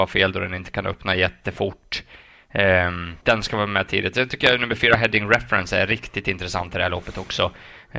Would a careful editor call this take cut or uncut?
cut